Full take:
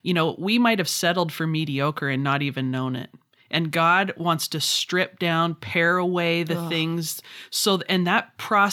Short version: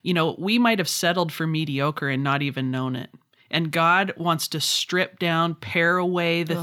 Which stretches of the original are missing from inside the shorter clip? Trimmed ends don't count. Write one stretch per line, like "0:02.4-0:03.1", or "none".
none